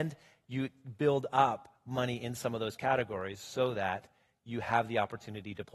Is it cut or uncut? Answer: uncut